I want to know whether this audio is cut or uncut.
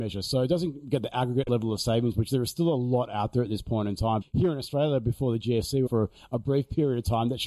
cut